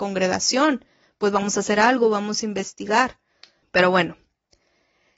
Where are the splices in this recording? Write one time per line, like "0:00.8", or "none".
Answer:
0:03.6